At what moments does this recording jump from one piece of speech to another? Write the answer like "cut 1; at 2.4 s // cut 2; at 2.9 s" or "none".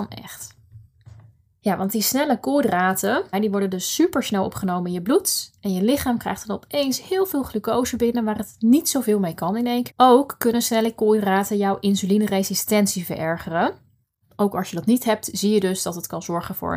cut 1; at 3.3 s // cut 2; at 9.9 s